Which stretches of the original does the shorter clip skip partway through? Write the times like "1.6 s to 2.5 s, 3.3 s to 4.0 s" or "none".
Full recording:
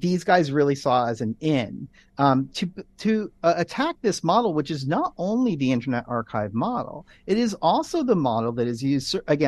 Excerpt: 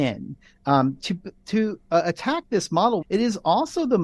4.5 s to 7.2 s

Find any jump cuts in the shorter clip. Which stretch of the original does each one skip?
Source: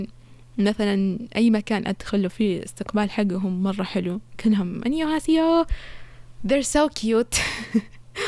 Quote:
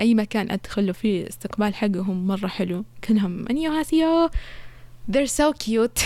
none

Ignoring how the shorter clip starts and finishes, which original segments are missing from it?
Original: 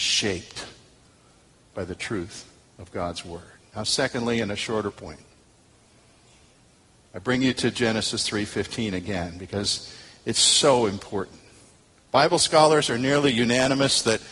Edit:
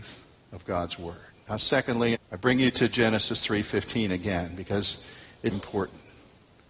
4.4 s to 7.0 s, 10.3 s to 10.9 s

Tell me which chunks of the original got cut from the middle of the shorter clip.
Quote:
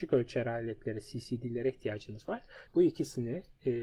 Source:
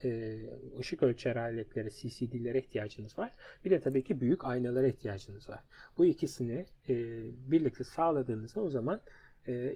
3.6 s to 5.9 s

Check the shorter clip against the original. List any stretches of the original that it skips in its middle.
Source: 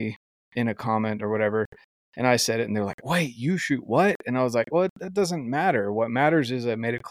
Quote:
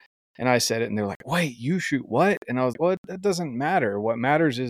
4.5 s to 4.6 s

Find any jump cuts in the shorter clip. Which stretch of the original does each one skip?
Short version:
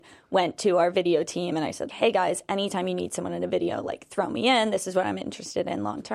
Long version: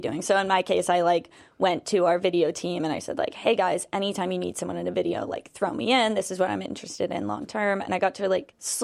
3.2 s to 3.3 s

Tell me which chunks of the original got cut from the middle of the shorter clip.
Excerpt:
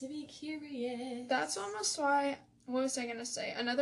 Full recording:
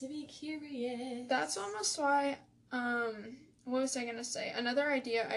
2.6 s to 3.6 s

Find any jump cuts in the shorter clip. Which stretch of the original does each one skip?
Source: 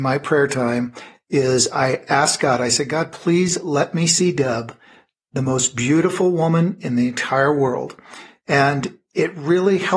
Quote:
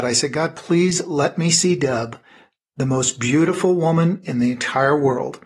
none

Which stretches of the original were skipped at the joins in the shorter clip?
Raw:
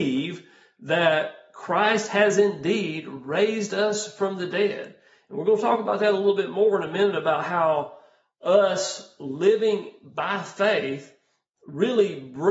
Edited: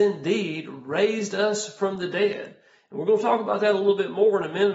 none

